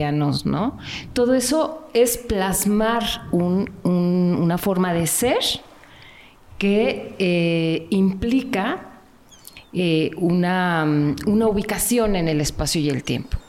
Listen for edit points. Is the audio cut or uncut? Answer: uncut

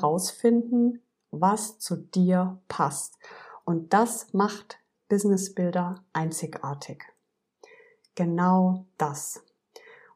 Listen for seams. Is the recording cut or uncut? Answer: uncut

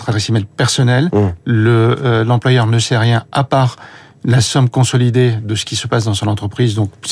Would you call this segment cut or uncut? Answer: uncut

